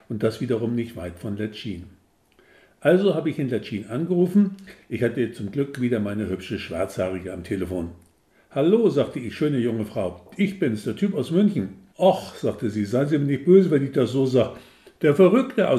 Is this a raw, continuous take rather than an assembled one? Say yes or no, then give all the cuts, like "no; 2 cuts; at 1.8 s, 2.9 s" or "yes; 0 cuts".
no; 1 cut; at 11.9 s